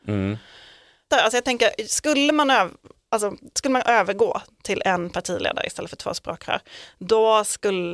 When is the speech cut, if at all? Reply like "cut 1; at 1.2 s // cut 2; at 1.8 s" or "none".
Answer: cut 1; at 1.1 s